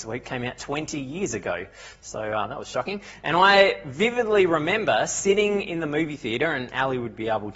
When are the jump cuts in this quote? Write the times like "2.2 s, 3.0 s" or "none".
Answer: none